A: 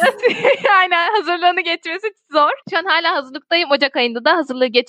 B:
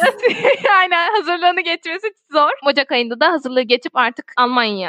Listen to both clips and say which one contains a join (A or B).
B